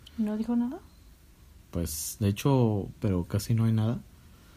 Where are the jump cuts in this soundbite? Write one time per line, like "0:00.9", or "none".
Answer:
0:03.0